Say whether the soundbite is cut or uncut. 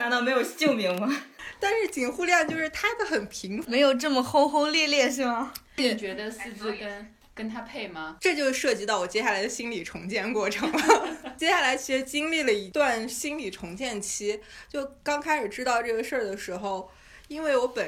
uncut